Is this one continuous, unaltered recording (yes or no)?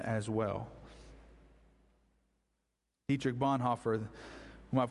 yes